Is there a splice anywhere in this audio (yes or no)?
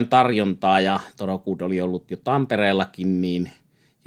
no